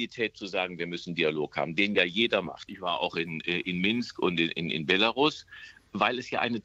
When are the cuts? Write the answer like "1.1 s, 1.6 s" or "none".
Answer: 2.7 s